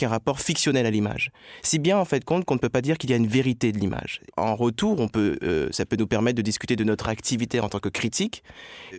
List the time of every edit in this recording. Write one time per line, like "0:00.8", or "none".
none